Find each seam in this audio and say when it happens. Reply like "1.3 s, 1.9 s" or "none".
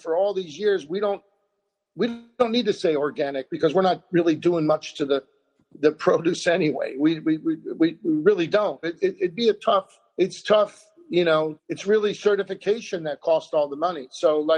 8.8 s, 10.1 s, 11.6 s